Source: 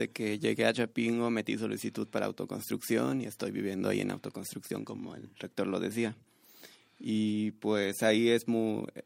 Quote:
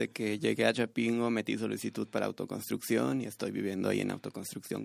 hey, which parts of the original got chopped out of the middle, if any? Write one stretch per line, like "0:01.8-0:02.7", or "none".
none